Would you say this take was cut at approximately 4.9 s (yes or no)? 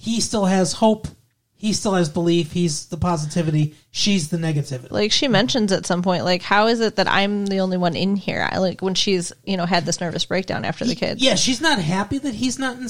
yes